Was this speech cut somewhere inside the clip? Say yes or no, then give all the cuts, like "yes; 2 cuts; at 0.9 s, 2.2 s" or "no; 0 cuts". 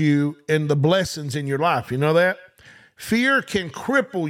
no; 0 cuts